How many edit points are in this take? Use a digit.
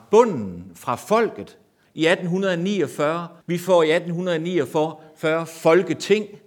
2